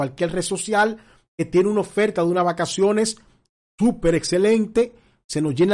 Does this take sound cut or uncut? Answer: uncut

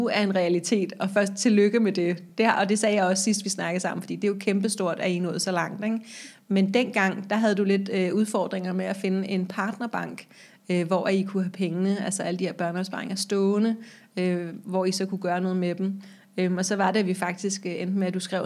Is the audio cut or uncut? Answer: uncut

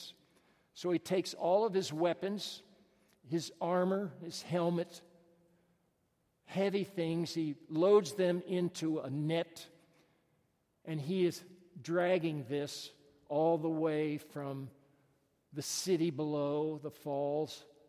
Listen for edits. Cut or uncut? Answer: uncut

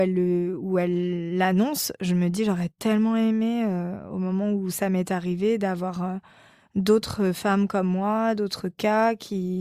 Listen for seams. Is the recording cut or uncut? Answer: uncut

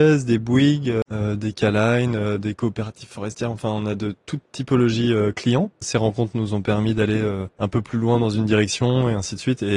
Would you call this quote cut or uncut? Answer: cut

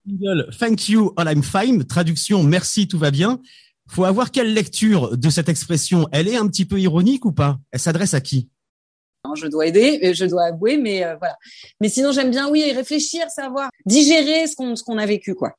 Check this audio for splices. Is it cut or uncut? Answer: cut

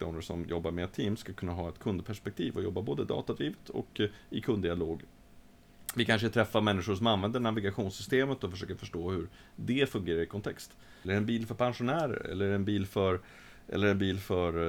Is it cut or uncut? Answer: cut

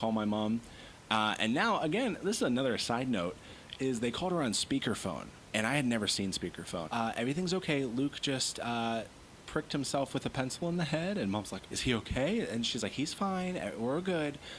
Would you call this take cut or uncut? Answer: cut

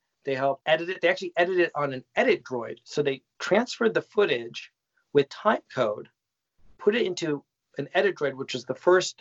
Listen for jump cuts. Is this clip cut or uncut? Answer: uncut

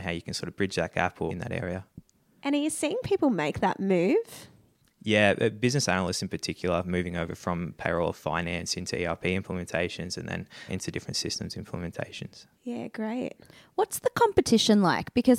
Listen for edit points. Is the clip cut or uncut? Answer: cut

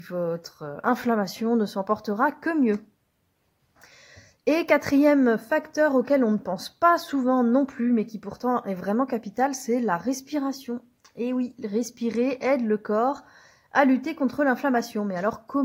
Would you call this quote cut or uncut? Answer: uncut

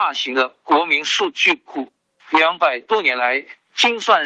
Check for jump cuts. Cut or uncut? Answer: uncut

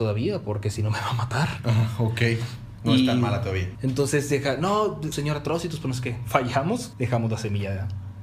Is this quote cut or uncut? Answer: cut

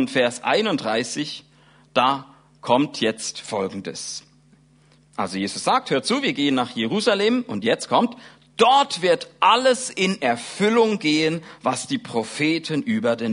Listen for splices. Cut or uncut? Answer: uncut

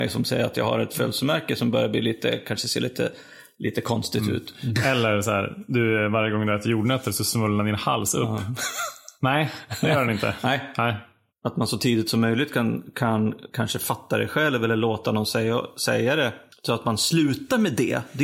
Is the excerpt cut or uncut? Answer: cut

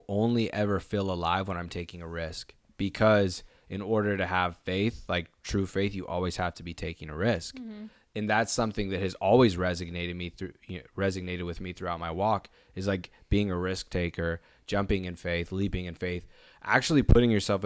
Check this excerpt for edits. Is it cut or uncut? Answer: uncut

